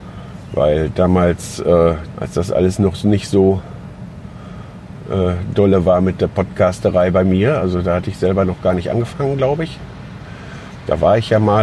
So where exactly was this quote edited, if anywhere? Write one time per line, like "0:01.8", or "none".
0:02.1